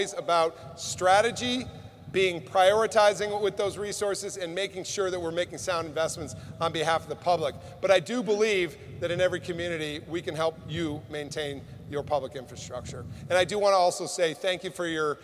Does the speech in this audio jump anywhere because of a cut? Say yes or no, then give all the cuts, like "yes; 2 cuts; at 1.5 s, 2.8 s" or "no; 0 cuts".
no; 0 cuts